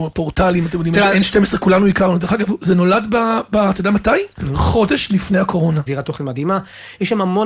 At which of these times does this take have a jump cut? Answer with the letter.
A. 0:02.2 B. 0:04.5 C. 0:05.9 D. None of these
C